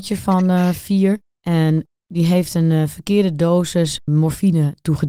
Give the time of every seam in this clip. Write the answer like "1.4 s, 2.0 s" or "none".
none